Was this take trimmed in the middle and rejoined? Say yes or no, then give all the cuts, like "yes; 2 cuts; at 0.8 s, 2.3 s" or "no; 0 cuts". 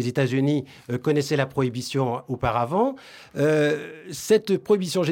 no; 0 cuts